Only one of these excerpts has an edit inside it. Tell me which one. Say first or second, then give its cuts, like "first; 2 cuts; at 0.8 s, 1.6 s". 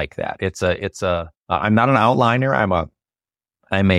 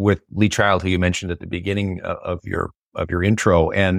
first; 1 cut; at 1.4 s